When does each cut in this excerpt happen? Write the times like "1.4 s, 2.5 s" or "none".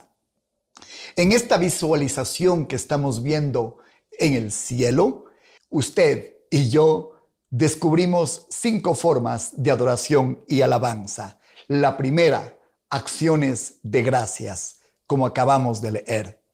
5.6 s